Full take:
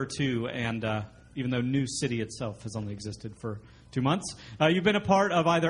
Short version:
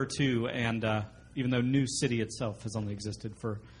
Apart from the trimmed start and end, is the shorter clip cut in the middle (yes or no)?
no